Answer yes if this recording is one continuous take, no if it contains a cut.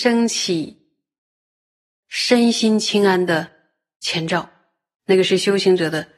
no